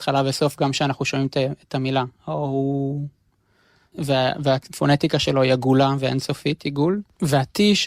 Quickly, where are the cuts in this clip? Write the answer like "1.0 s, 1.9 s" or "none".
3.9 s